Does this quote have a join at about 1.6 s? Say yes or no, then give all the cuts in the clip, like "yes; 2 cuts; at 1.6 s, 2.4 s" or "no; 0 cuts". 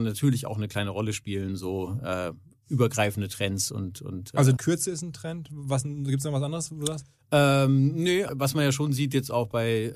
no; 2 cuts; at 4.6 s, 8.3 s